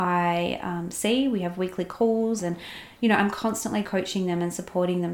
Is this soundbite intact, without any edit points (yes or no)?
no